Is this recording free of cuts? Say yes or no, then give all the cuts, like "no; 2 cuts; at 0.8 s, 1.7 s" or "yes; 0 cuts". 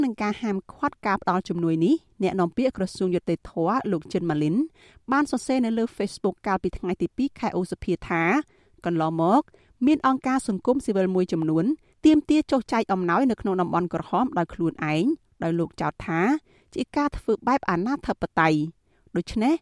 yes; 0 cuts